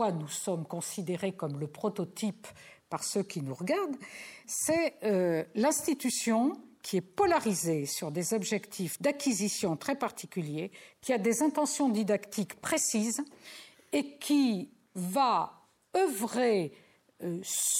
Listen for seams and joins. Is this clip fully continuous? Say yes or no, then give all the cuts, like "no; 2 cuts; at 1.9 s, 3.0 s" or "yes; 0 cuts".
yes; 0 cuts